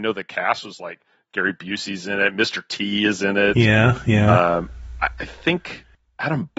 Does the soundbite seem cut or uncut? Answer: uncut